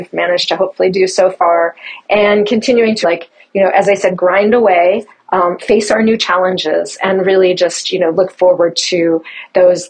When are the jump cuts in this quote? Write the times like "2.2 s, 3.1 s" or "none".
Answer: 3.0 s